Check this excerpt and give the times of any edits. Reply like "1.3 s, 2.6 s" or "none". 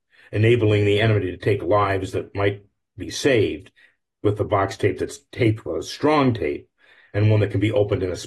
none